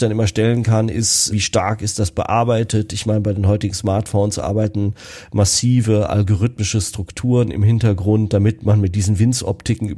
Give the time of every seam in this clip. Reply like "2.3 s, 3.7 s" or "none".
1.3 s